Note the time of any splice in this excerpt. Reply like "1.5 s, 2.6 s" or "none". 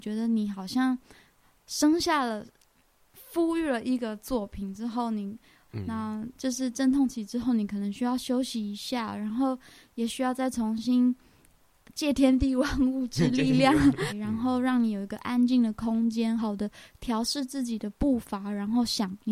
5.7 s, 14.1 s, 16.4 s